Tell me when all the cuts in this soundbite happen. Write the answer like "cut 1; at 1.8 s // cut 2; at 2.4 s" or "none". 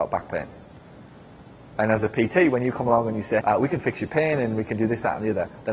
cut 1; at 3.4 s